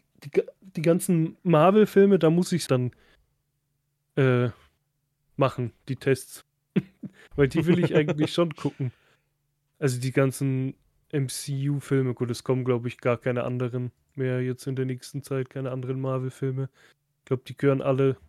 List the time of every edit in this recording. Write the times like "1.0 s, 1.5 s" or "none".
2.7 s